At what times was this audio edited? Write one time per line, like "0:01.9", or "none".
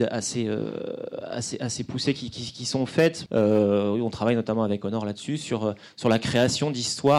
0:03.3